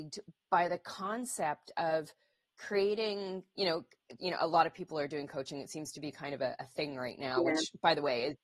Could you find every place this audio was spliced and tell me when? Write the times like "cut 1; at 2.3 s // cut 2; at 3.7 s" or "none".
cut 1; at 4.2 s